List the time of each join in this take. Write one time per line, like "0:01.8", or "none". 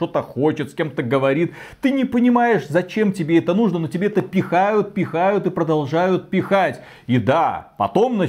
none